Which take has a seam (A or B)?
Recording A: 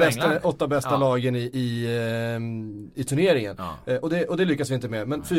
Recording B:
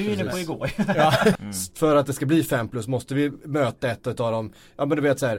B